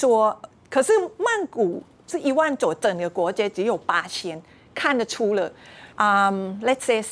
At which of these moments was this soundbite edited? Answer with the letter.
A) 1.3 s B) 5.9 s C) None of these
B